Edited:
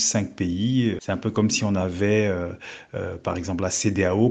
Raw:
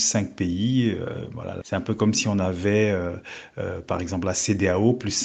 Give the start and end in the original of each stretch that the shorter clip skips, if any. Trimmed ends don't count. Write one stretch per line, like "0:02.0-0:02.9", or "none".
0:01.0-0:01.6